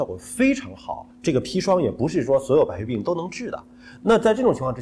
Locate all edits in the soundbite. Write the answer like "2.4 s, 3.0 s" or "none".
1.1 s